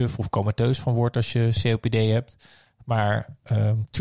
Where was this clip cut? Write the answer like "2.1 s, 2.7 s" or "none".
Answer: none